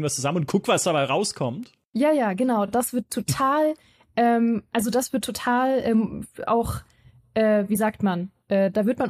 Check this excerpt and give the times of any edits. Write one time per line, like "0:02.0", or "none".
none